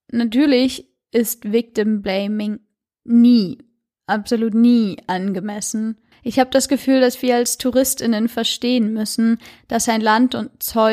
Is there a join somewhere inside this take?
yes; 1 cut; at 6.1 s

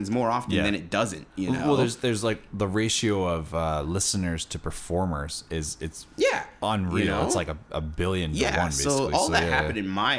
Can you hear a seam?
no; 0 cuts

